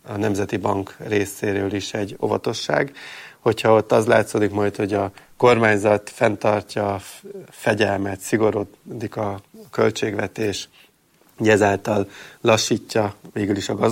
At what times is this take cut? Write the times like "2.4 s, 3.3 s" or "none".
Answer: none